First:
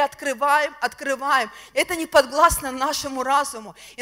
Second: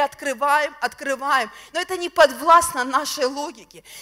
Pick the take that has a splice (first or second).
first